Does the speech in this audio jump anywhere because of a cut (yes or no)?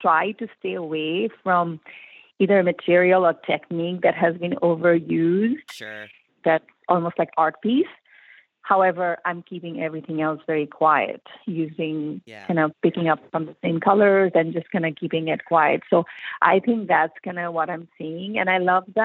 yes